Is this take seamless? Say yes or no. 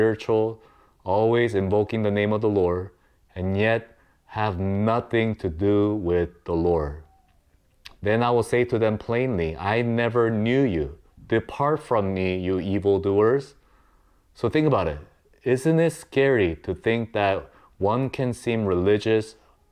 no